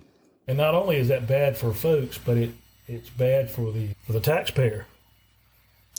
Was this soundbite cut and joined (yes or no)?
yes